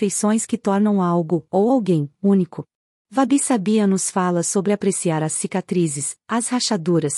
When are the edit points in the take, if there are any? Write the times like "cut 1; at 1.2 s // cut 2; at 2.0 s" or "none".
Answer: cut 1; at 2.9 s // cut 2; at 6.2 s

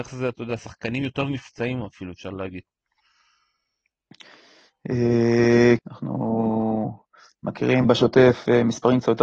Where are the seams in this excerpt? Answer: cut 1; at 5.8 s // cut 2; at 7.8 s

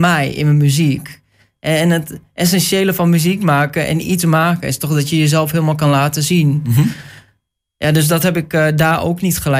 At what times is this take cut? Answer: none

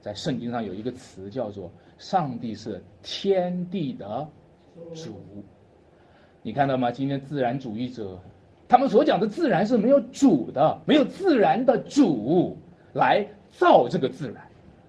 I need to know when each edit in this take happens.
cut 1; at 8.7 s

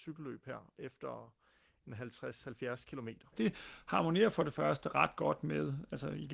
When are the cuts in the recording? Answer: cut 1; at 3.3 s

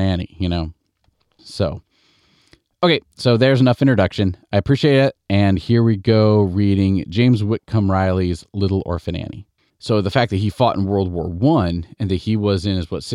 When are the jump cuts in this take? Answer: cut 1; at 1.4 s // cut 2; at 9.7 s

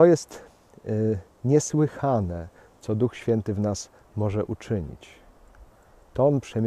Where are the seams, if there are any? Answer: none

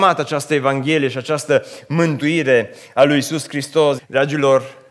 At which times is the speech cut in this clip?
cut 1; at 4.0 s

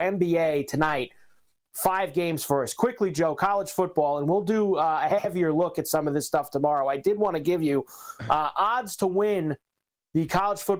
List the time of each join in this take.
none

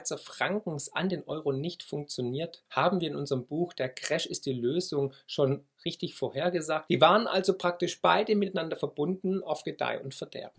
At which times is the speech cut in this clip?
cut 1; at 6.9 s

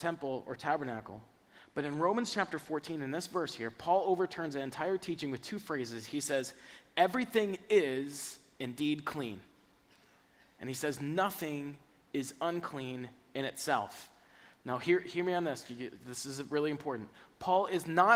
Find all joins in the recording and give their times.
none

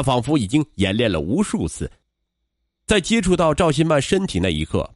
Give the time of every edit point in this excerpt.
none

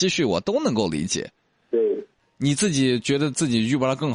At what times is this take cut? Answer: cut 1; at 2.2 s

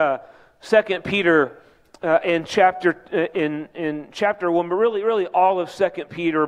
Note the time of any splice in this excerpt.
none

